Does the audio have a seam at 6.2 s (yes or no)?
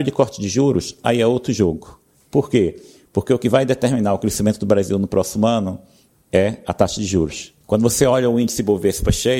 no